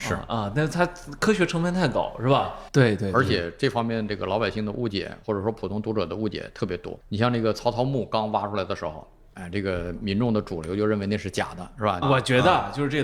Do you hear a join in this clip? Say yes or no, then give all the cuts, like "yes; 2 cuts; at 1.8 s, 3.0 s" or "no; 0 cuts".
yes; 3 cuts; at 2.7 s, 7.0 s, 12.0 s